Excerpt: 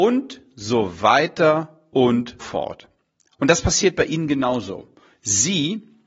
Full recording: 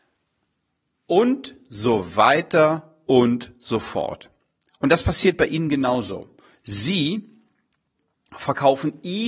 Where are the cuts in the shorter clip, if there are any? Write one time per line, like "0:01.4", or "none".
0:02.4